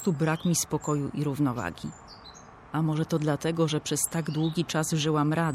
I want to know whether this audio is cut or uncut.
uncut